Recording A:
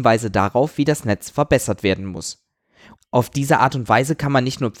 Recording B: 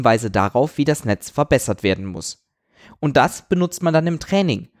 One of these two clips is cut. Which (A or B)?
A